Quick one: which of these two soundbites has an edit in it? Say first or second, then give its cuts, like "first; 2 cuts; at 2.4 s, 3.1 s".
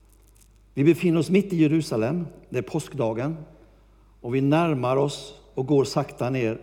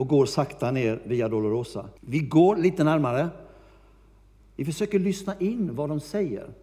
second; 2 cuts; at 2.0 s, 4.4 s